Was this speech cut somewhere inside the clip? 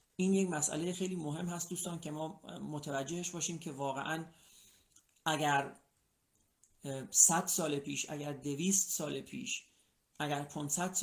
yes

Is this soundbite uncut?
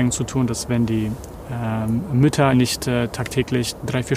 no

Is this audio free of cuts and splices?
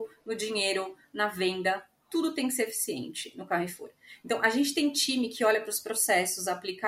yes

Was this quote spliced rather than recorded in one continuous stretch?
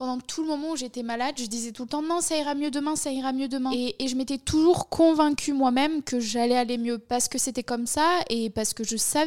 no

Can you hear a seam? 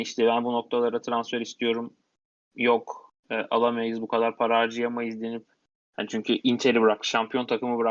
no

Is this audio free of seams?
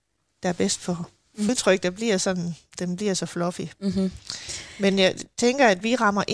no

